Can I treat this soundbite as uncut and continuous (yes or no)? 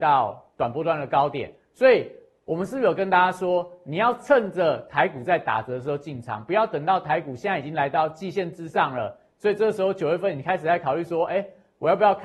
yes